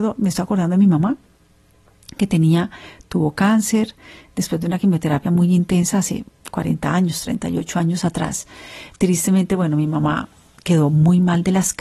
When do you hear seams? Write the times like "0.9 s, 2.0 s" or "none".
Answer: none